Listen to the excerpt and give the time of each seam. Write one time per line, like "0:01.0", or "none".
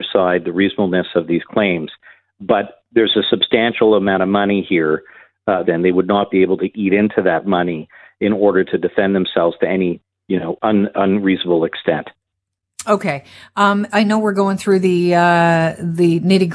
0:05.6
0:13.9